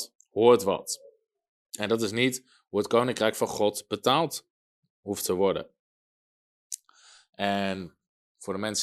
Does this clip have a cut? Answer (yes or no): no